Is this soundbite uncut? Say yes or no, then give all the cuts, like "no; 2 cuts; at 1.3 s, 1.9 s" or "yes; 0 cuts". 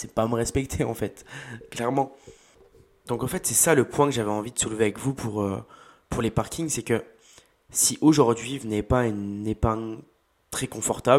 yes; 0 cuts